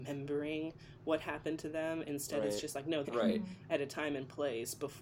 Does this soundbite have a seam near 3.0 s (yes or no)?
yes